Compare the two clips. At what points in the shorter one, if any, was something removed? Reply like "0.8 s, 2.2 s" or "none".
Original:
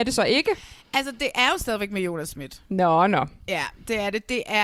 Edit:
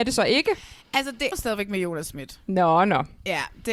1.3 s